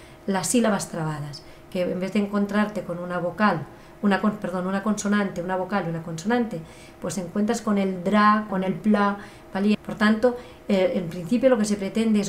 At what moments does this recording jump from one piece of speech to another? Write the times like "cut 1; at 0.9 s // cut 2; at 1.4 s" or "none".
cut 1; at 8.5 s // cut 2; at 9.7 s